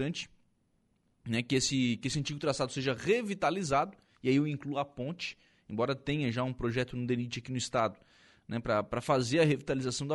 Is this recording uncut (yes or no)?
yes